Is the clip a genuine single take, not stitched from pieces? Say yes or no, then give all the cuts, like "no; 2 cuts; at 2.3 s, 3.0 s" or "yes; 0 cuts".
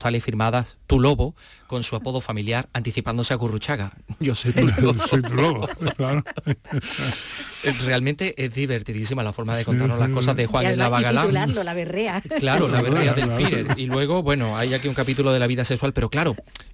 yes; 0 cuts